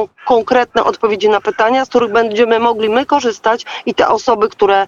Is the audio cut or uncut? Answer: uncut